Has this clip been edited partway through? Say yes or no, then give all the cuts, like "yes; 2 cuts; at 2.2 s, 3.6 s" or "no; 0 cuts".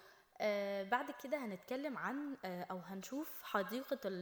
no; 0 cuts